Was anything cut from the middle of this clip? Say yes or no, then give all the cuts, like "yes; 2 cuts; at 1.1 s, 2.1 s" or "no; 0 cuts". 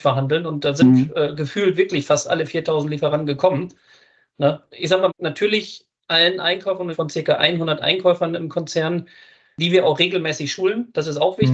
yes; 2 cuts; at 5.1 s, 6.9 s